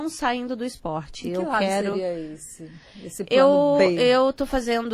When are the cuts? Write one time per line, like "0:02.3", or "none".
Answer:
none